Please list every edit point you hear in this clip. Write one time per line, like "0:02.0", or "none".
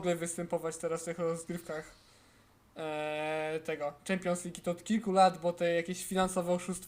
none